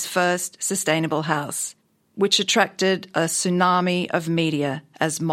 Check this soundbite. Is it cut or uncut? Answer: uncut